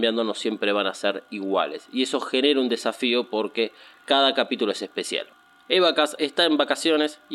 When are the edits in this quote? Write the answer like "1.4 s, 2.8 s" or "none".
6.2 s